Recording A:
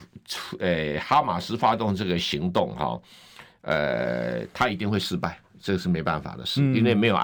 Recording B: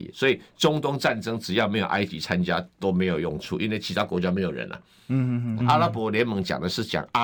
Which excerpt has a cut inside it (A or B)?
B